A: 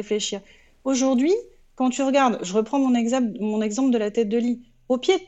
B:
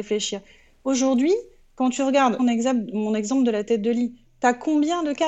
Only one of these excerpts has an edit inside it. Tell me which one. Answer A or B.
B